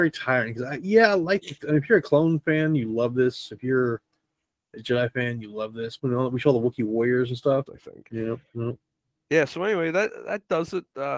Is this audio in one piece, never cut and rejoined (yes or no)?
no